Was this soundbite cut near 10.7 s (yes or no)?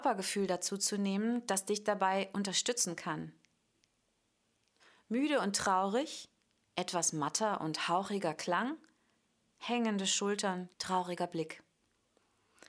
yes